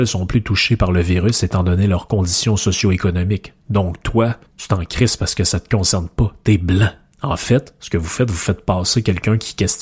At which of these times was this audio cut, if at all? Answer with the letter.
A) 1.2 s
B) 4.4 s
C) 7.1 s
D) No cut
B